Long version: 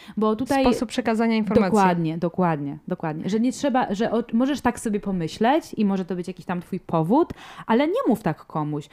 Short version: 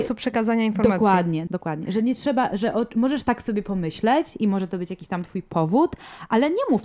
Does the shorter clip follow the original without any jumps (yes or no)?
no